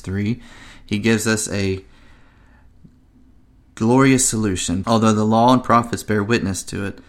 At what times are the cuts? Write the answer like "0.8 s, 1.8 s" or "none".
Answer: 4.8 s